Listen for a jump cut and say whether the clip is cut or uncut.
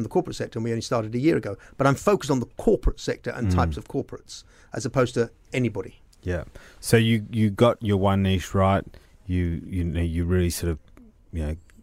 uncut